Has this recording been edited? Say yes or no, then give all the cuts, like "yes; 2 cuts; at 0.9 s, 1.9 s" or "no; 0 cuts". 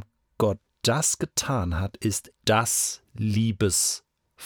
yes; 1 cut; at 2.3 s